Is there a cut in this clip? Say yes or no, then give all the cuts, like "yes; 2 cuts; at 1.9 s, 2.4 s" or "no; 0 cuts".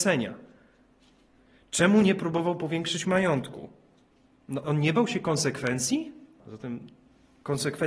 yes; 2 cuts; at 4.6 s, 6.4 s